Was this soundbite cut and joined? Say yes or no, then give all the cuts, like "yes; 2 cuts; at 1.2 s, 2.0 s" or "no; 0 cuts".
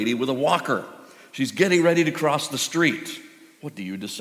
no; 0 cuts